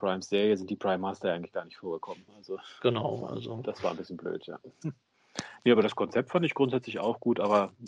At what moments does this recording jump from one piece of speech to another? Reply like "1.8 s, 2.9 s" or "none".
none